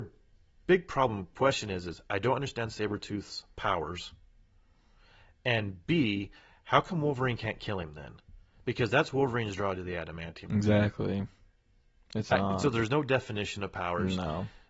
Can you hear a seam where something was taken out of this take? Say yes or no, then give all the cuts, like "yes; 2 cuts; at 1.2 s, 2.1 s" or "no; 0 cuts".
yes; 1 cut; at 10.5 s